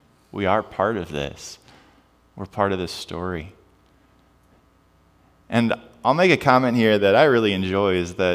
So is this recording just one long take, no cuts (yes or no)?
yes